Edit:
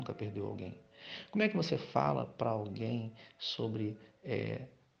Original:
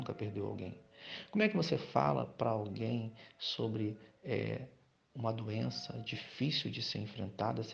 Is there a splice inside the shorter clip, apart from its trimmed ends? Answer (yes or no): no